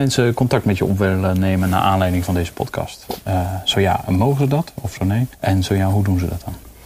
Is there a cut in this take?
yes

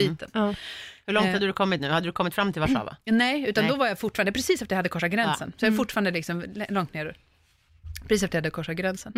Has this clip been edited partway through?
no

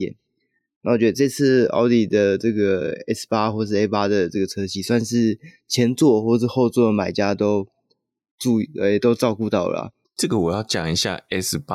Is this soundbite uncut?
no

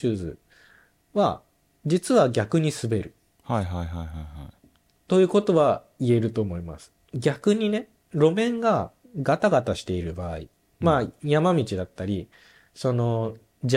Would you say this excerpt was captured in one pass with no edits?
yes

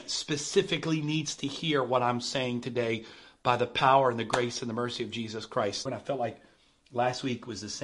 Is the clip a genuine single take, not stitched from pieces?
no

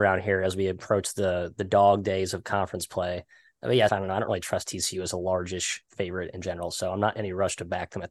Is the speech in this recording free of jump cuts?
no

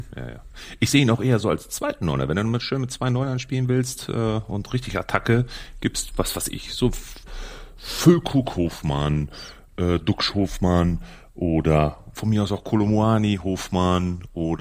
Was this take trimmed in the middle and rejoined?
no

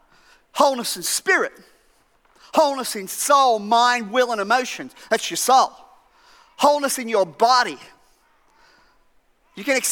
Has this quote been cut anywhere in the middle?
no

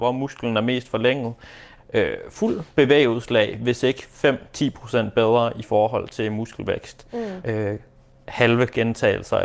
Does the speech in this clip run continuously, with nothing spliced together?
no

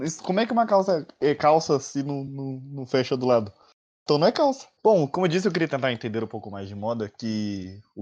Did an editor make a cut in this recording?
no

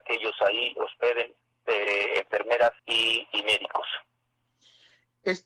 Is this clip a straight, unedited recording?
no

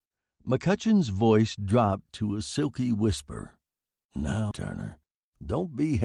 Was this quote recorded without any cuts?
no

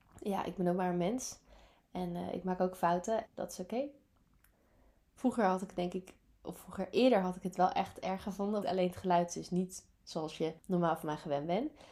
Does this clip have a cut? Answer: yes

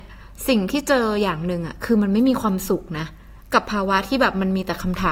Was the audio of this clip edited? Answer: no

